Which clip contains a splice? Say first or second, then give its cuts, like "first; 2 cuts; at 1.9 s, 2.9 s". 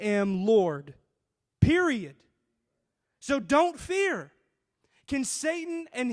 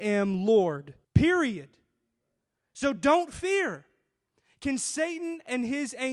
second; 1 cut; at 1.0 s